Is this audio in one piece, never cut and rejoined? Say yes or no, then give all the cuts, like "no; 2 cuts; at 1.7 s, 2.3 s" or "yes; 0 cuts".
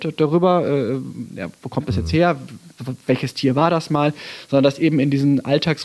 yes; 0 cuts